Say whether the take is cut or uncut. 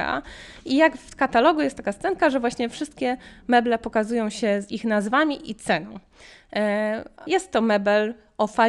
cut